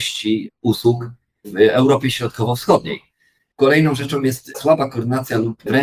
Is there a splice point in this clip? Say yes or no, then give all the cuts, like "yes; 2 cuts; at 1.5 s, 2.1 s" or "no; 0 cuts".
no; 0 cuts